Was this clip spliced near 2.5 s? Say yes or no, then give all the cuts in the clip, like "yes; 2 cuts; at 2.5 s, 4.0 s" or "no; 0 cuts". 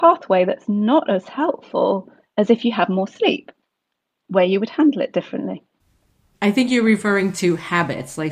no; 1 cut; at 6.3 s